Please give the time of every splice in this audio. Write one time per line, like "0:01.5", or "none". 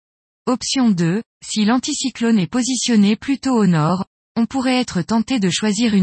0:01.3